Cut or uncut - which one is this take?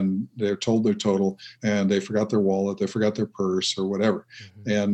cut